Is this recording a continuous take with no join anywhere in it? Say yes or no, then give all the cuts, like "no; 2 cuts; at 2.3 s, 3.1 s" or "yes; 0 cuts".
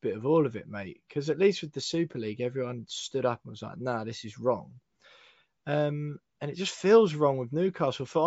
yes; 0 cuts